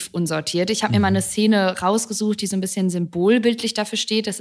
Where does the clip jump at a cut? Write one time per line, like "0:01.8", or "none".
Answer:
none